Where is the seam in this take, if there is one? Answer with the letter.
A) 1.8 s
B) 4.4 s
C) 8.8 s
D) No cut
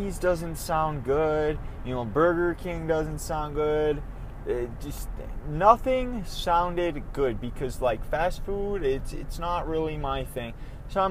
D